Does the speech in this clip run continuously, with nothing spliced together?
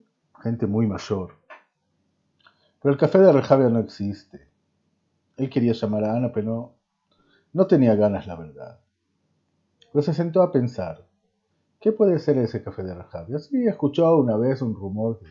yes; 0 cuts

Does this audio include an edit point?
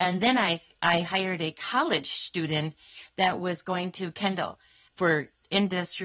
no; 0 cuts

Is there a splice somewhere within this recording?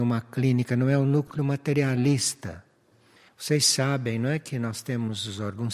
yes; 1 cut; at 3.3 s

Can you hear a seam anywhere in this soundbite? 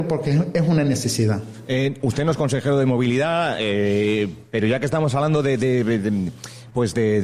no; 0 cuts

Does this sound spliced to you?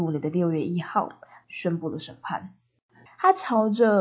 yes; 2 cuts; at 1.4 s, 3.1 s

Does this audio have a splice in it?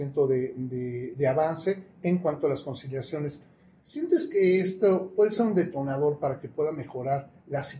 no; 0 cuts

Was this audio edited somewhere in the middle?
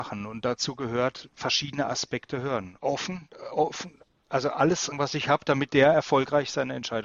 yes; 2 cuts; at 2.8 s, 4.9 s

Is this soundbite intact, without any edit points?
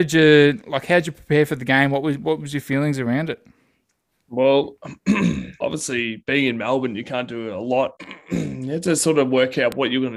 no; 2 cuts; at 5.6 s, 8.0 s

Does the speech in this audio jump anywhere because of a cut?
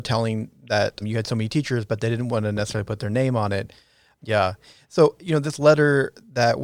yes; 2 cuts; at 1.0 s, 4.2 s

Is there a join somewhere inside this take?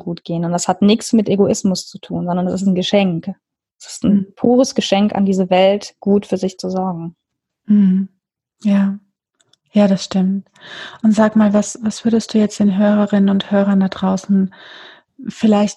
no; 0 cuts

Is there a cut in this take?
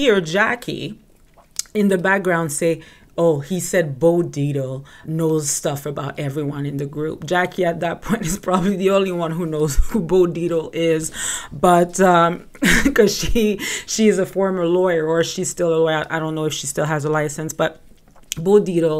yes; 1 cut; at 5.0 s

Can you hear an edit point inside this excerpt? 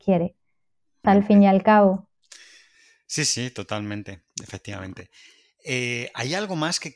yes; 1 cut; at 1.0 s

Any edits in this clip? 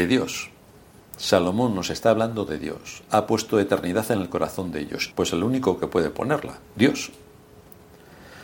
yes; 2 cuts; at 5.1 s, 6.6 s

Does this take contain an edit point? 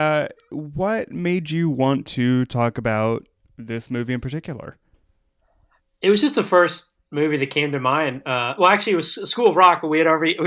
no; 0 cuts

